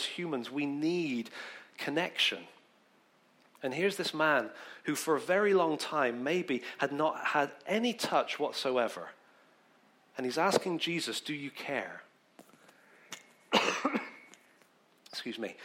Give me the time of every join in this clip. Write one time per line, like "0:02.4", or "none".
none